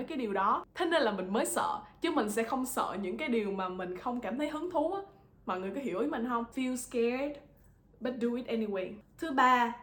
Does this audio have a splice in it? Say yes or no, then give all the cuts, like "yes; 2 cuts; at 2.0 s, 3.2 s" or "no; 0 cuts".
yes; 1 cut; at 6.5 s